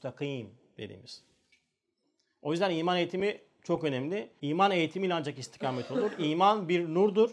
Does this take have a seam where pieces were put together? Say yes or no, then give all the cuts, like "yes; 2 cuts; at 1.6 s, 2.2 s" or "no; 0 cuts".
yes; 1 cut; at 4.4 s